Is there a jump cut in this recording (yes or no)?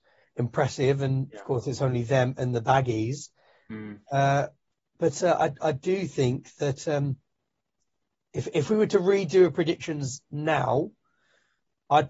no